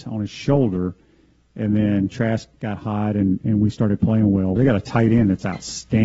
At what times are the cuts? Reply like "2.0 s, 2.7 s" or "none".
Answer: 4.6 s